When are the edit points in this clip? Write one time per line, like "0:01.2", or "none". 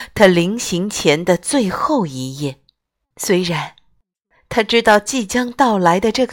0:03.0